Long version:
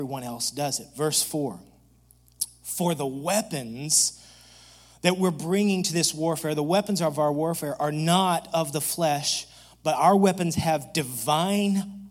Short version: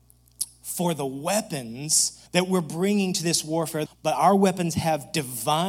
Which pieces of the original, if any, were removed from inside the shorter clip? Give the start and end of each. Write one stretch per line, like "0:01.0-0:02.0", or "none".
0:04.3-0:05.0
0:06.5-0:09.7